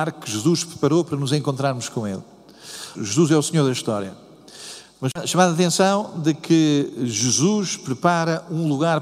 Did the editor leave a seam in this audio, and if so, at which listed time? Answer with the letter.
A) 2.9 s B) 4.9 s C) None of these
A